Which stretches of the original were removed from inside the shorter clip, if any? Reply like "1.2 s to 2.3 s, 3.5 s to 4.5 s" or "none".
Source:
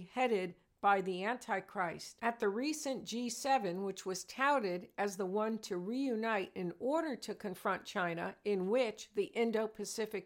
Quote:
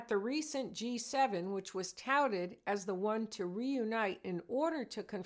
none